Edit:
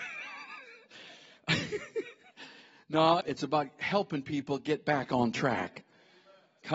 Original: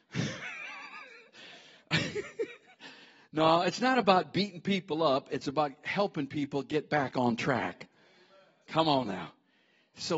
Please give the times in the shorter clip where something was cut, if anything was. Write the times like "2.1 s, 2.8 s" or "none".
3.2 s